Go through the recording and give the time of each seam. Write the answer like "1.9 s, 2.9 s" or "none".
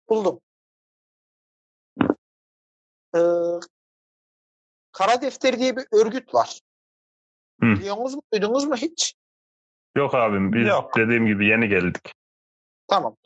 none

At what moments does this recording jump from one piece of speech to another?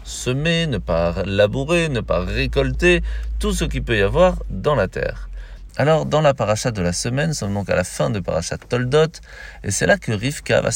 5.7 s

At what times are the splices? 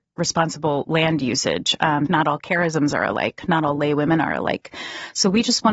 2.1 s

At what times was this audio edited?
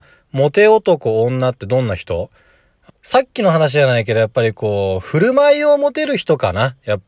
2.9 s

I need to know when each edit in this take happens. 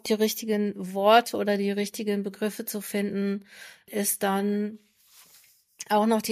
3.9 s

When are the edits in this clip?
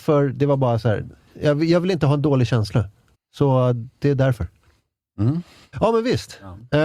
3.1 s, 5.7 s

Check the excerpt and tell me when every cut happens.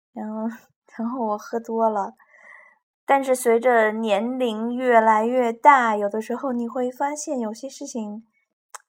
2.9 s

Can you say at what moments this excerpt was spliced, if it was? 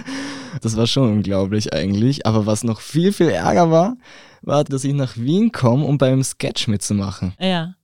4.7 s

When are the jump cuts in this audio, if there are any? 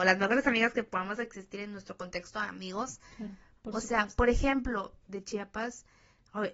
3.6 s, 5.0 s

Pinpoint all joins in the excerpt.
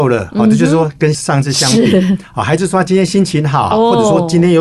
3.7 s

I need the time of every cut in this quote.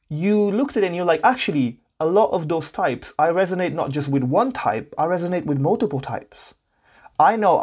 none

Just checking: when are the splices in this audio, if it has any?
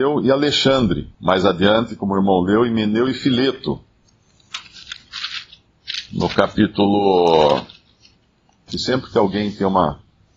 1.1 s, 8.7 s

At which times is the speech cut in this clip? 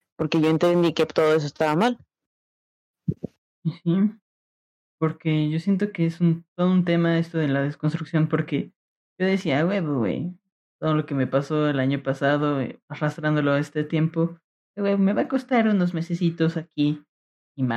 none

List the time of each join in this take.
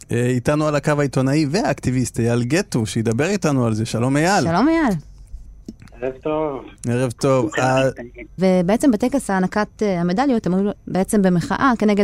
8.4 s, 10.8 s

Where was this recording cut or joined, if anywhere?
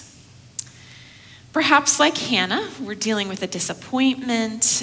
none

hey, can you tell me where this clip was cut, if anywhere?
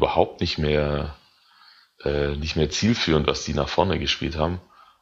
none

